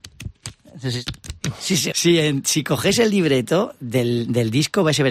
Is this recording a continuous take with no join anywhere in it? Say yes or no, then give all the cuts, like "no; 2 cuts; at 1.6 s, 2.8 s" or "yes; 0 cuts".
no; 1 cut; at 1.9 s